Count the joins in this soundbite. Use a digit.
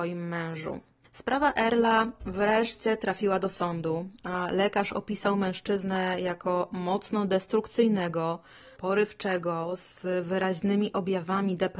1